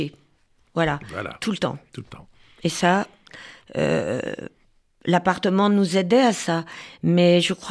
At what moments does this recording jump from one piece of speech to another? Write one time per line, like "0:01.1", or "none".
none